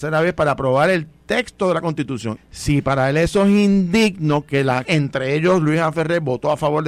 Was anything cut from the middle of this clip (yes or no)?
yes